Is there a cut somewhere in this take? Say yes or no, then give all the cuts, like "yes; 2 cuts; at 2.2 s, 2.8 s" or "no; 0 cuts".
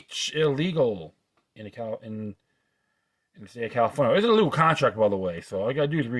no; 0 cuts